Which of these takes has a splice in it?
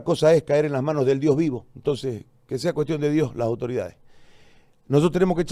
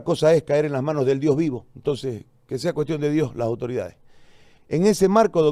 second; 1 cut; at 4.6 s

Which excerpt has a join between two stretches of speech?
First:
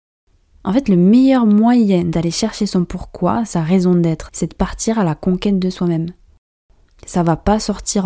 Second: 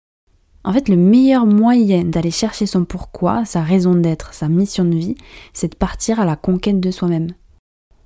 first; 1 cut; at 4.3 s

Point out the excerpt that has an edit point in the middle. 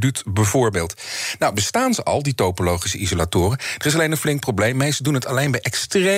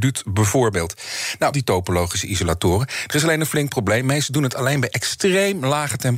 second; 1 cut; at 1.5 s

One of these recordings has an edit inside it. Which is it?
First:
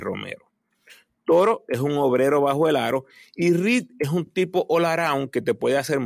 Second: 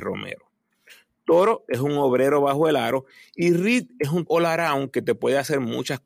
second; 1 cut; at 4.3 s

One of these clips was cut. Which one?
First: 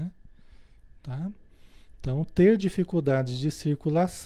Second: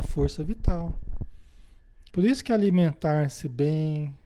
second; 1 cut; at 2.1 s

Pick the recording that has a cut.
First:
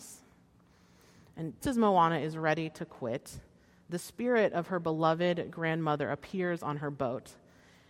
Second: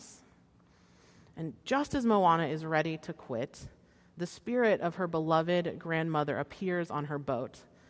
first; 1 cut; at 1.6 s

